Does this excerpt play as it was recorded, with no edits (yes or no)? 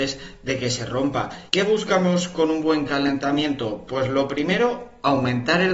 no